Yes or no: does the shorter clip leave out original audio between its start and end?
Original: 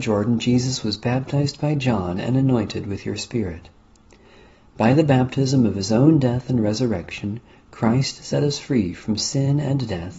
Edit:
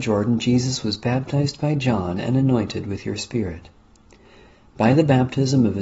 no